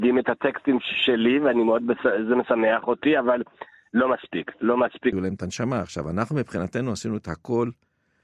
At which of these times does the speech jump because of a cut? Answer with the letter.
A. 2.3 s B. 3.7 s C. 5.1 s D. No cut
C